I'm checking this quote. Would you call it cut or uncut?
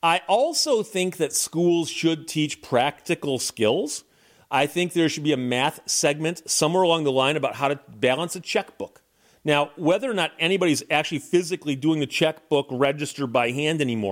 uncut